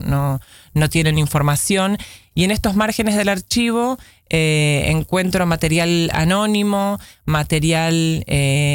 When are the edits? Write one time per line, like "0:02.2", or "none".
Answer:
0:02.3